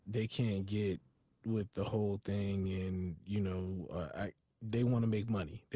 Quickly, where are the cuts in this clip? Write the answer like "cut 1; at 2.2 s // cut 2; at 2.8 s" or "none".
none